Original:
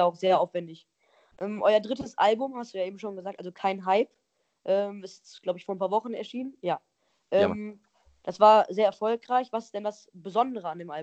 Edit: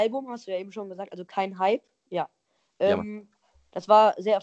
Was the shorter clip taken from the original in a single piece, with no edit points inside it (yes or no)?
no